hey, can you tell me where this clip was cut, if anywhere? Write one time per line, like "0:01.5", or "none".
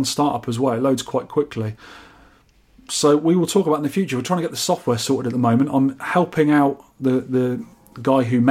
none

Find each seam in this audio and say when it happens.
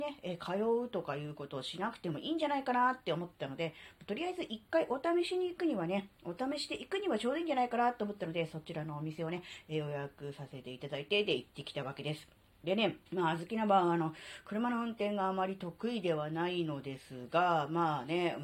0:13.1

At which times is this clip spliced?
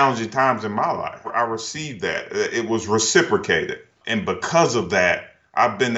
0:04.0

